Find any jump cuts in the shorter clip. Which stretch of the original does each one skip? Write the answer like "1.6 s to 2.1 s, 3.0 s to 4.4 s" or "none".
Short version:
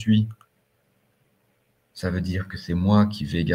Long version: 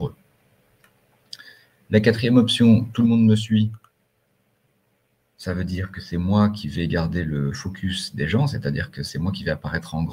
none